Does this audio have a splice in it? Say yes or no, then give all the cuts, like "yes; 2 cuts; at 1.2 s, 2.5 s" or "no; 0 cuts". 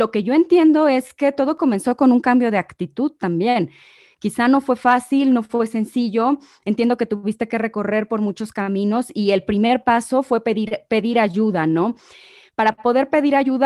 no; 0 cuts